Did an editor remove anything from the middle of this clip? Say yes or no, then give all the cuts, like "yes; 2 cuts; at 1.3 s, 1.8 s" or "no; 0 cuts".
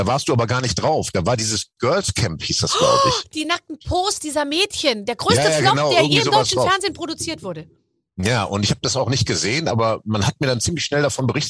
no; 0 cuts